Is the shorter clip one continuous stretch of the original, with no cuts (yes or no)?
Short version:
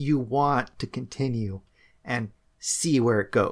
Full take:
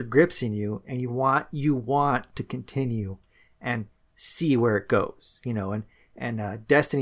yes